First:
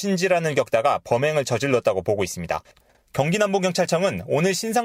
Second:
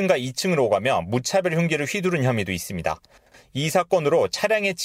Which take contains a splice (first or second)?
first